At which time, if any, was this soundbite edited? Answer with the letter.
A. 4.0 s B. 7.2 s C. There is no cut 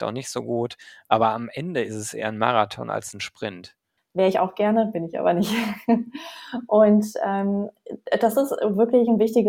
A